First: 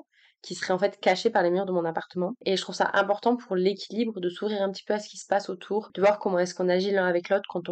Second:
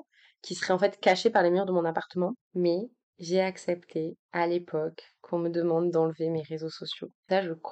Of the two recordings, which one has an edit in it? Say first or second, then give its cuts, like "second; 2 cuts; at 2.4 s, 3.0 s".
second; 1 cut; at 2.4 s